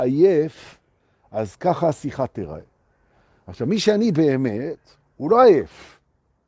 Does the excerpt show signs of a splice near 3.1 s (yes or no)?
no